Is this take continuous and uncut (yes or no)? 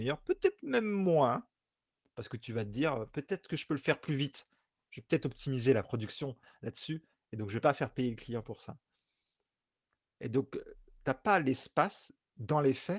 yes